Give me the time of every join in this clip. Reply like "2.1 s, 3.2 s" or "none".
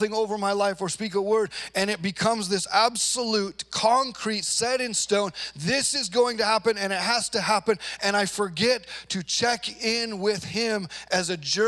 none